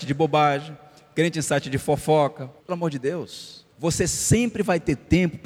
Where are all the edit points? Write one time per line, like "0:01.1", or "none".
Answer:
0:02.6
0:03.7

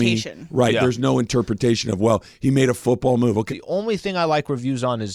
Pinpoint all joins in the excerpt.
0:03.5

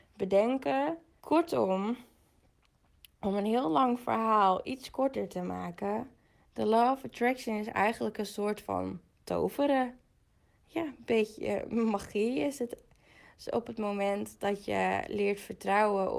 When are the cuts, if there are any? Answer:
0:01.2

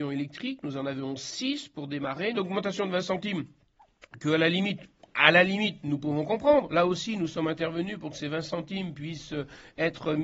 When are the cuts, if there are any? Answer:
0:02.4

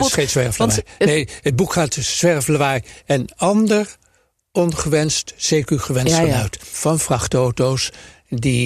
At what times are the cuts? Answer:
0:06.7

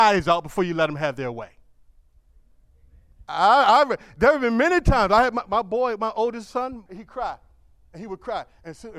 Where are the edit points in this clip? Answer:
0:03.2
0:06.9

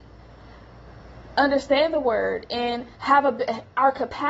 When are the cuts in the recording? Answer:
0:02.9

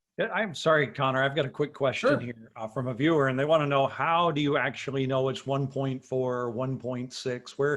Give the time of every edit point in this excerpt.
none

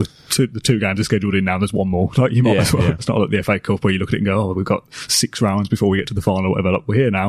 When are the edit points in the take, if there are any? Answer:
0:03.0

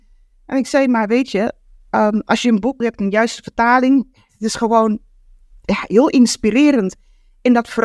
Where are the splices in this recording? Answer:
0:02.8

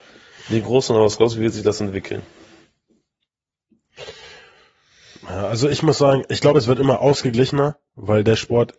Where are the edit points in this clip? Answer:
none

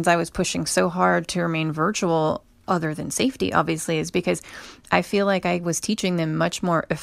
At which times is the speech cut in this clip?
none

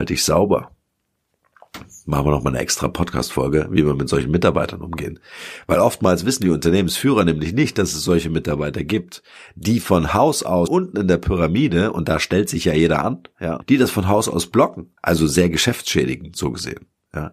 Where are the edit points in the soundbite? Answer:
0:10.7
0:13.6
0:15.0

